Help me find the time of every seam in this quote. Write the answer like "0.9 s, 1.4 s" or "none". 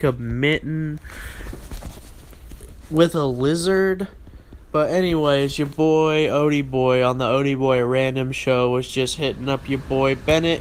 4.6 s

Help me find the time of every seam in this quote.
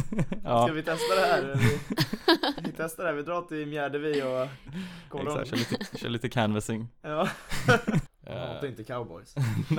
5.4 s, 8.1 s

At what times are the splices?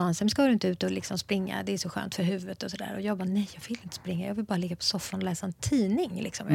none

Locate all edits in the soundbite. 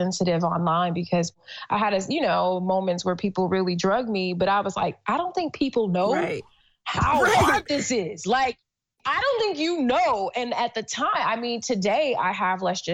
none

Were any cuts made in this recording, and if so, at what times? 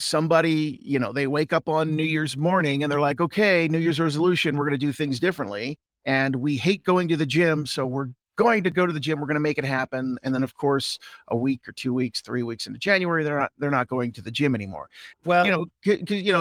15.1 s

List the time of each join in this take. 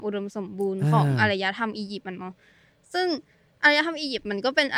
none

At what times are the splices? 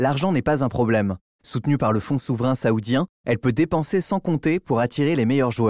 none

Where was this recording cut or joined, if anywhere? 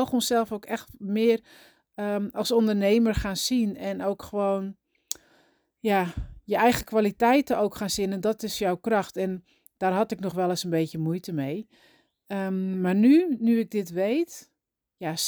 none

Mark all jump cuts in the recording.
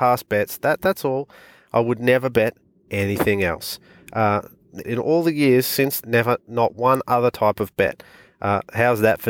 4.8 s, 6.0 s

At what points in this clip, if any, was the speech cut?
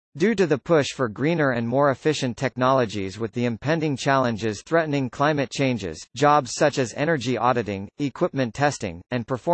none

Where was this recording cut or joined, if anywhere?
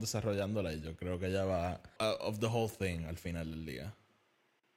2.0 s

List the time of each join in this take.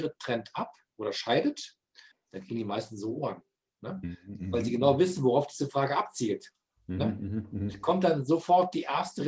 2.1 s

